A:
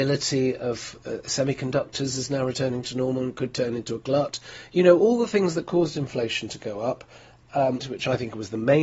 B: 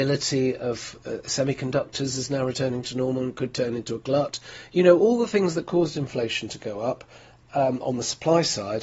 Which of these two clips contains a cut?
A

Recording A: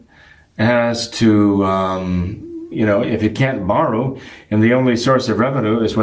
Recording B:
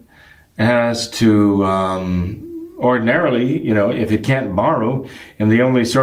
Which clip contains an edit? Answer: A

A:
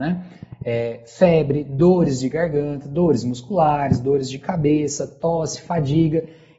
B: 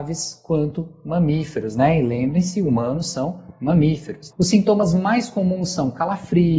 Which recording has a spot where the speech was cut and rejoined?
B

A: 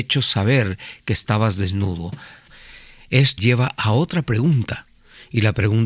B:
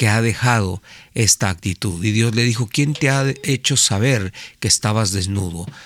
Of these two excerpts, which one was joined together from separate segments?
A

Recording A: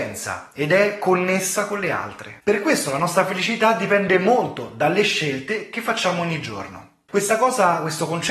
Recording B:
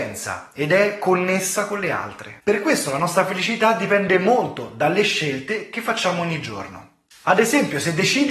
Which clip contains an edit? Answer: A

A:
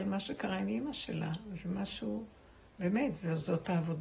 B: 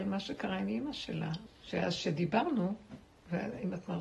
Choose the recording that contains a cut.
B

